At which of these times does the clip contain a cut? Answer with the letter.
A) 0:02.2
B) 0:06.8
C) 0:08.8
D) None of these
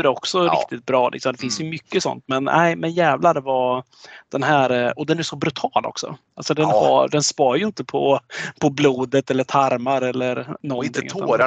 D